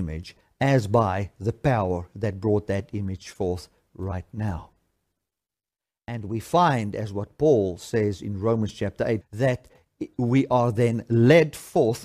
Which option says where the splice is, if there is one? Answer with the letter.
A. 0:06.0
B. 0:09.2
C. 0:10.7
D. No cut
B